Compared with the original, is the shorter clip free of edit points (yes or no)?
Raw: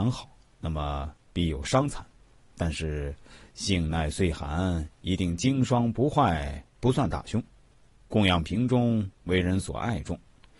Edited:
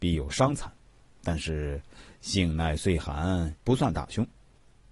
no